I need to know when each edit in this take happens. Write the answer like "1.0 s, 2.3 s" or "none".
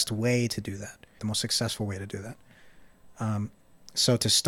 1.2 s

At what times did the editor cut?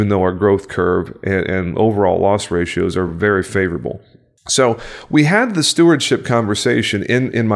none

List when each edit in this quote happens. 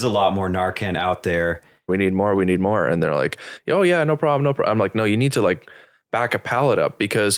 1.9 s

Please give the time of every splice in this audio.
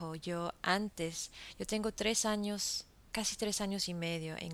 3.0 s

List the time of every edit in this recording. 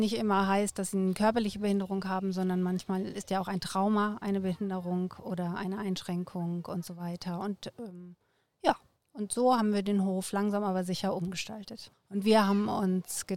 11.9 s

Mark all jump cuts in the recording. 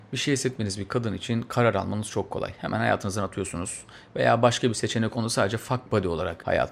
none

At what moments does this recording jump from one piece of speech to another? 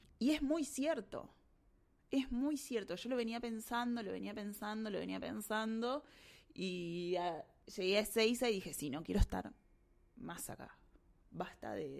none

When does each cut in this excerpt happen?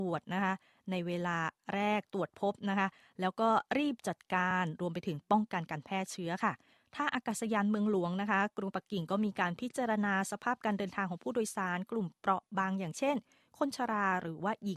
none

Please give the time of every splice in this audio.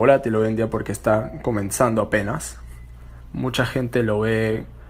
none

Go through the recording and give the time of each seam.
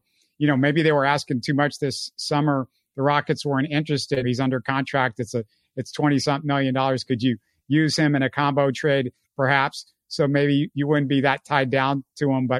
4.2 s, 7.0 s

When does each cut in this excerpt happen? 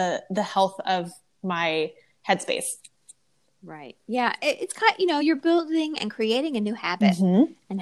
none

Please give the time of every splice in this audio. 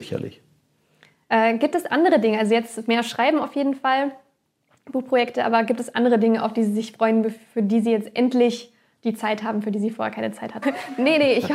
1.2 s, 10.6 s

